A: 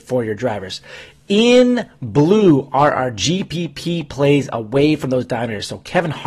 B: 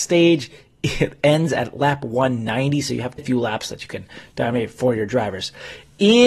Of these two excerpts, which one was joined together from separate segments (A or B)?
B